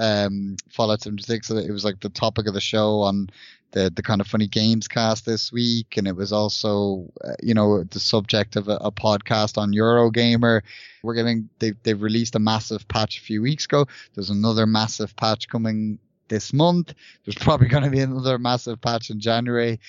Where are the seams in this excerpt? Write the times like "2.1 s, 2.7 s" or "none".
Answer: 11.0 s